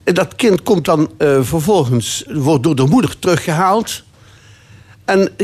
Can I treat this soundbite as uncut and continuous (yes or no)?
no